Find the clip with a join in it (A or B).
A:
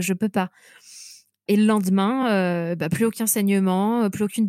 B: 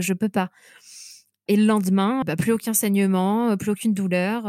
B